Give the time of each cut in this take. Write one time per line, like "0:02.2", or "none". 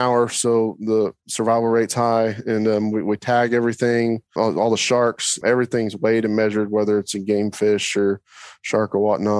0:04.4
0:05.4